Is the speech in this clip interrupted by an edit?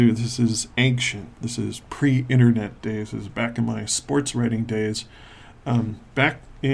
no; 0 cuts

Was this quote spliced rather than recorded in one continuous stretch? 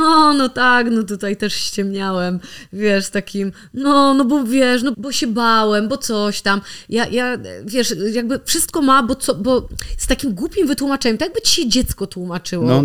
yes; 1 cut; at 4.9 s

